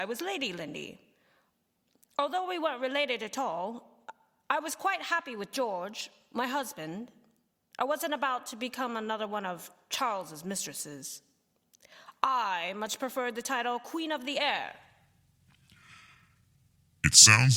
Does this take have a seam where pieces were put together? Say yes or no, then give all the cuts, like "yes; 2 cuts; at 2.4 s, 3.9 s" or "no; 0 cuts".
no; 0 cuts